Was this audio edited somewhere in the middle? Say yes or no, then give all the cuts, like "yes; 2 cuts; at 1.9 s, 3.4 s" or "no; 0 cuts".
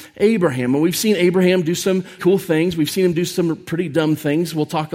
yes; 1 cut; at 2.2 s